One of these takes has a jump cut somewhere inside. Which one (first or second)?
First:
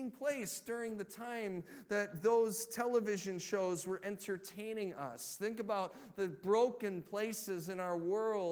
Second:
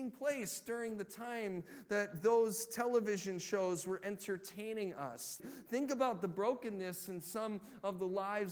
second